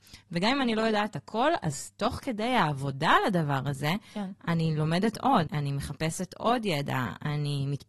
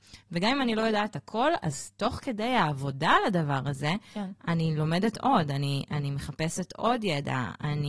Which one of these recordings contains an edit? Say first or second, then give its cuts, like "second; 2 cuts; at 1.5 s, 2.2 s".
first; 1 cut; at 5.5 s